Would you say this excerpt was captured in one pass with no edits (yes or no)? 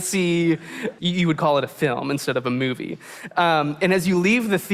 no